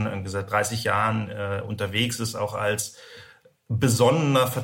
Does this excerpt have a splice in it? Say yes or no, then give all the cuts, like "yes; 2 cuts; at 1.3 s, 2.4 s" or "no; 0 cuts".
no; 0 cuts